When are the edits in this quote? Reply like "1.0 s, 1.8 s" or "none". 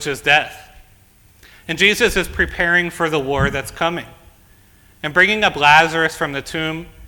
1.5 s